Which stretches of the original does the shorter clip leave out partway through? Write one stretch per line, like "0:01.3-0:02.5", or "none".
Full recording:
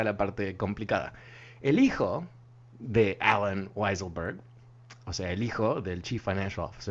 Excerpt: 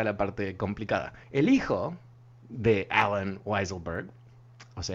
0:01.2-0:01.5